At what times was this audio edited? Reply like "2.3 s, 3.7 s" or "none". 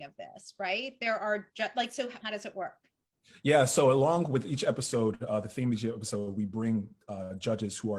2.2 s